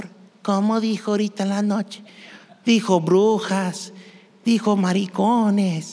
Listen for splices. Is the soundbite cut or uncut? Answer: uncut